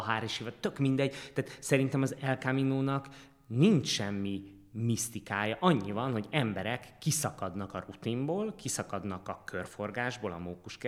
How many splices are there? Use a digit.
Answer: 0